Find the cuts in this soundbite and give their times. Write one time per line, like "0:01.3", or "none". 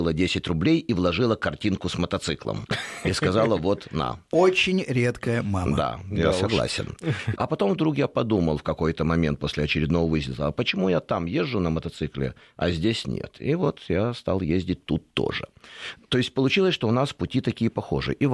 0:07.4